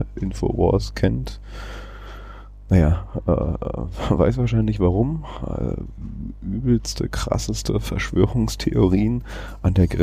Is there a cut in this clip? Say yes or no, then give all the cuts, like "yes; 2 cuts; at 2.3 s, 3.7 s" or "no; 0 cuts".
no; 0 cuts